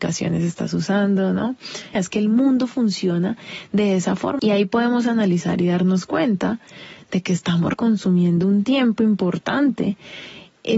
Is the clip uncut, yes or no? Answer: no